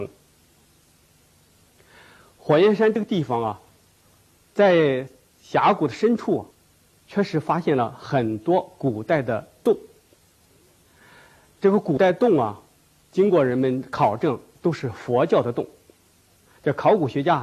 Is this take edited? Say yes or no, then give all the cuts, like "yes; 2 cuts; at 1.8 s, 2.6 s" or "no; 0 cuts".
yes; 1 cut; at 4.4 s